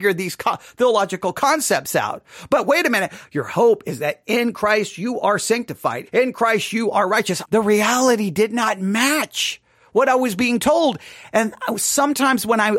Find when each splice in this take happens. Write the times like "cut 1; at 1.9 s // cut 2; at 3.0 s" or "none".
cut 1; at 3.2 s // cut 2; at 6.1 s // cut 3; at 7.4 s